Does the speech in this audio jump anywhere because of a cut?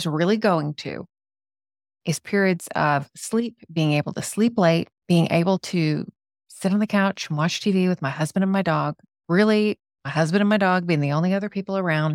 yes; 1 cut; at 5.0 s

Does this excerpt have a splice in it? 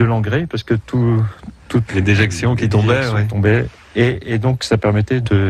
yes; 1 cut; at 1.9 s

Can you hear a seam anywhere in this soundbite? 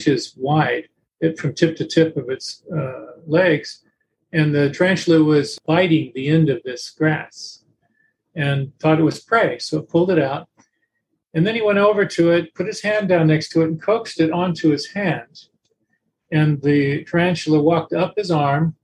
no; 0 cuts

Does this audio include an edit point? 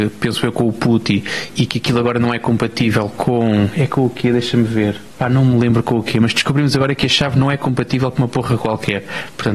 no; 0 cuts

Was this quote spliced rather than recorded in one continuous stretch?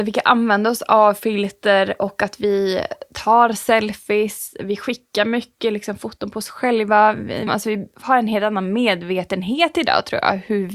yes; 1 cut; at 7.5 s

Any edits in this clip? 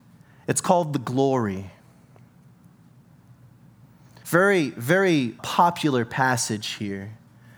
yes; 2 cuts; at 4.2 s, 5.4 s

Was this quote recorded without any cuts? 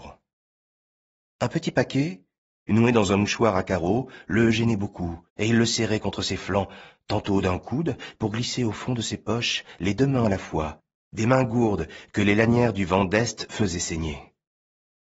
no; 2 cuts; at 5.3 s, 8.2 s

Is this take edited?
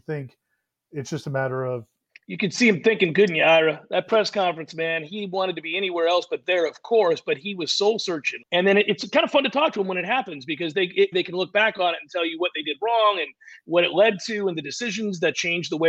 yes; 2 cuts; at 8.4 s, 11.1 s

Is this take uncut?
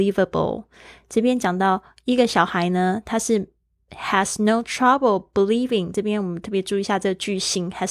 yes; 0 cuts

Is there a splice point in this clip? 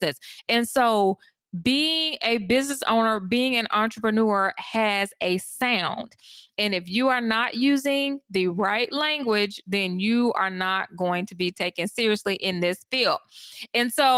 no; 0 cuts

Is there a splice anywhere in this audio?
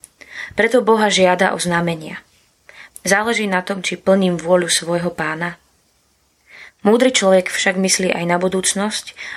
yes; 2 cuts; at 2.9 s, 6.7 s

